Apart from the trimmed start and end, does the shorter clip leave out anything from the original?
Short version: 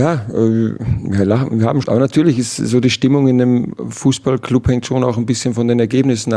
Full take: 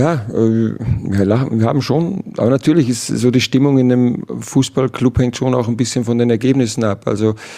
yes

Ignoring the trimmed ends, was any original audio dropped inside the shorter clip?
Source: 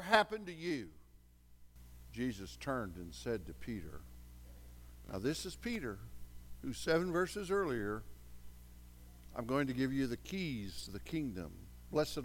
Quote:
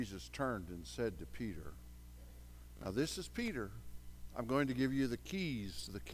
yes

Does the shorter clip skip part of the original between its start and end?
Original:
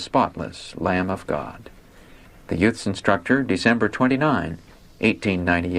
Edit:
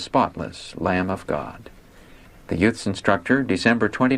no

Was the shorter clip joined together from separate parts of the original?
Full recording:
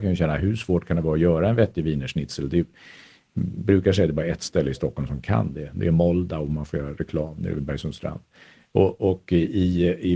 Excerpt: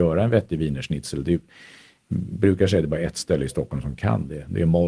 no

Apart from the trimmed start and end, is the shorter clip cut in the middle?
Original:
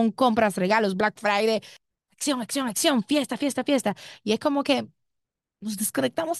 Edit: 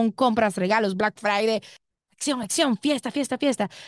yes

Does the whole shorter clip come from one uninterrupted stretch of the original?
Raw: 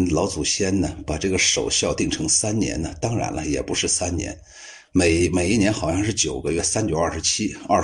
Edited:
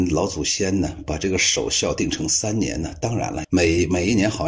no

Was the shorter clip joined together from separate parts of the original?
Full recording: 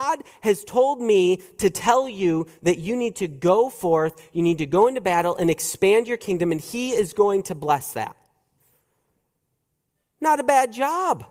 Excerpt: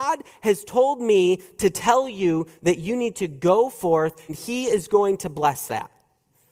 yes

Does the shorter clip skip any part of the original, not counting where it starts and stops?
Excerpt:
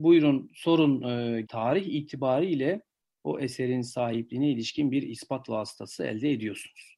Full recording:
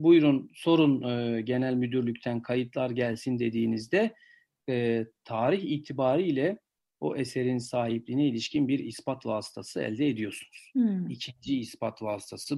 yes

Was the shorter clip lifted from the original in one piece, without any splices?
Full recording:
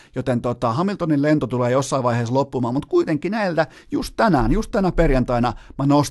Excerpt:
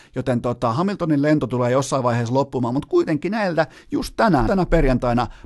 no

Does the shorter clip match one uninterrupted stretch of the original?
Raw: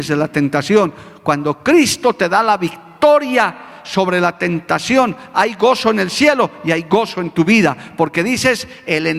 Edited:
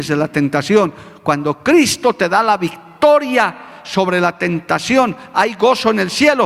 yes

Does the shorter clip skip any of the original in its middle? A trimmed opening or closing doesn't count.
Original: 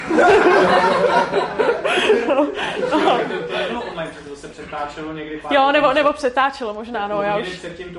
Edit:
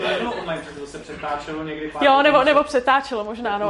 no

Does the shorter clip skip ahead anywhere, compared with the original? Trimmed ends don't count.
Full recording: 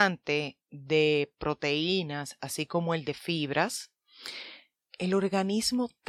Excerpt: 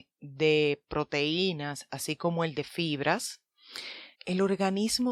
yes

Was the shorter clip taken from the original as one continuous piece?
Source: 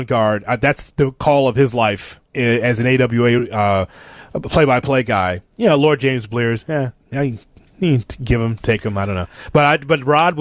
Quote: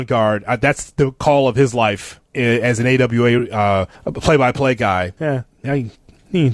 no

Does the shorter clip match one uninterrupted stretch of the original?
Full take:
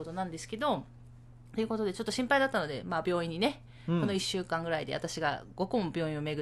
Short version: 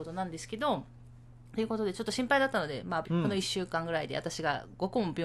no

